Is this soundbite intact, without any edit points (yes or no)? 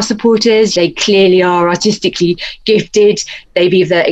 yes